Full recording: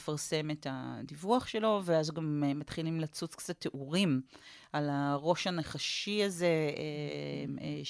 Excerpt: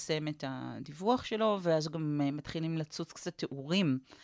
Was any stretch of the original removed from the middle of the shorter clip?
no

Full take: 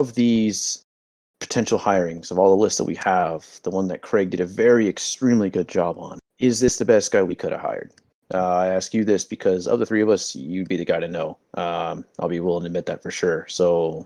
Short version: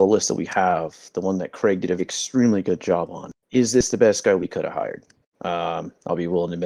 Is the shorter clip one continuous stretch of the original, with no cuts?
no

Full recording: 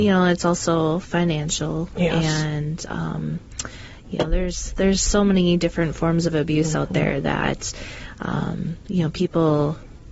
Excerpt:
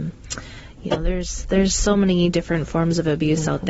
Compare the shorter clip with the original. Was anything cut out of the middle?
no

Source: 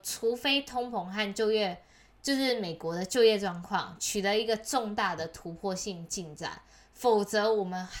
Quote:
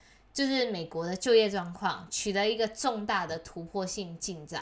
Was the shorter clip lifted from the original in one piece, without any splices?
yes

